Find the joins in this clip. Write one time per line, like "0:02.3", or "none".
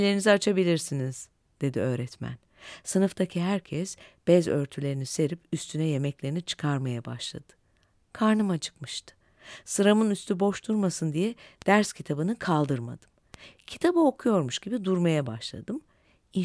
none